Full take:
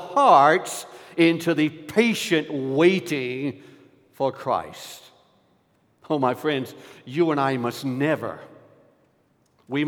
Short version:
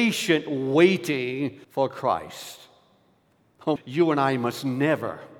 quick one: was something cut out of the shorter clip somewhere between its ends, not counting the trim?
yes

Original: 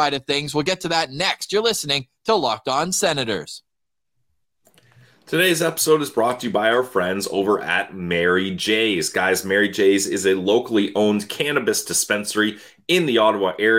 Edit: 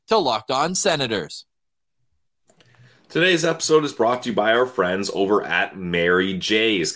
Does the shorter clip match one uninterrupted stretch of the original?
yes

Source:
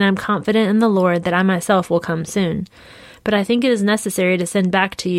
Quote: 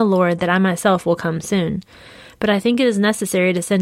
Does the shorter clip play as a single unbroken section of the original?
yes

